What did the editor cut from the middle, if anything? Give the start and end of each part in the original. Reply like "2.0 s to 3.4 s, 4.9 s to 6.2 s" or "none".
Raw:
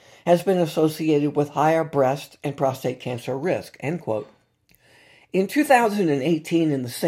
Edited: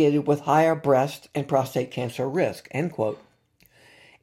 none